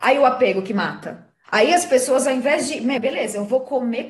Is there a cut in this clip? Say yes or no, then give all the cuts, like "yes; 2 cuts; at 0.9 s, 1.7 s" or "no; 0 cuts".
yes; 2 cuts; at 1.4 s, 3.0 s